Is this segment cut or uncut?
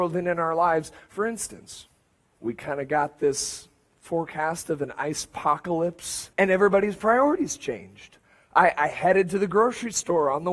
cut